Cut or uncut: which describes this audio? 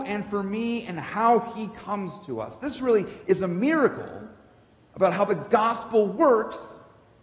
uncut